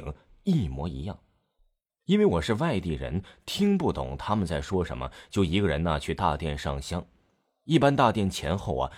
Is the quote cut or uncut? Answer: cut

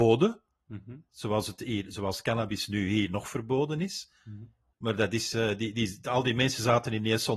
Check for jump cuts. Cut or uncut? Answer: cut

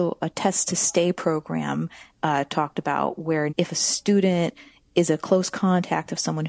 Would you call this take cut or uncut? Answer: cut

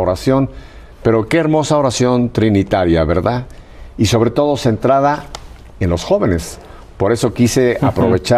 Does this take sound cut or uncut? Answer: uncut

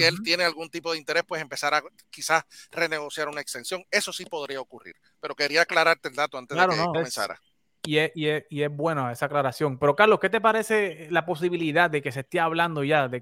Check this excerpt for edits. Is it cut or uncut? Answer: cut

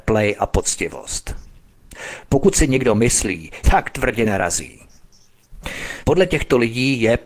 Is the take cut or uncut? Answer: cut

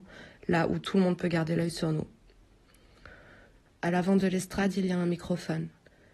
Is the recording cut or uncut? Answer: cut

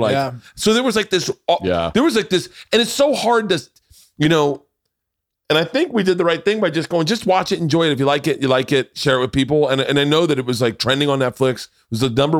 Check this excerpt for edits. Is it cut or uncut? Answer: uncut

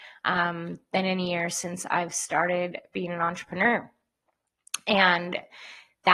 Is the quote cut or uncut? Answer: uncut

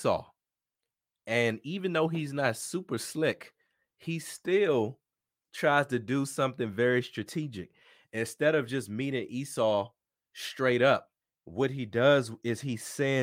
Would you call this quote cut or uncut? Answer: uncut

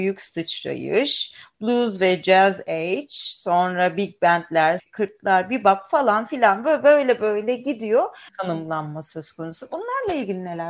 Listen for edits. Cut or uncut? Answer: cut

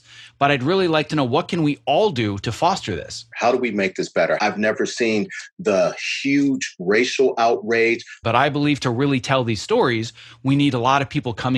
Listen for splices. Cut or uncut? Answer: cut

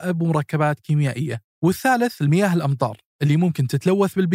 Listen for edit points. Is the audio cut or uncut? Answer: cut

